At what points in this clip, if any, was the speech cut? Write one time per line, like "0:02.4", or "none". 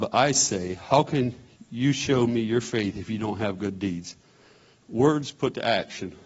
0:04.8